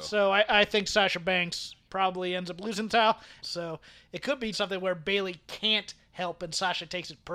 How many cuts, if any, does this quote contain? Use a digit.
2